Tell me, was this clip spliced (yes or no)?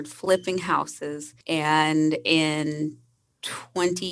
yes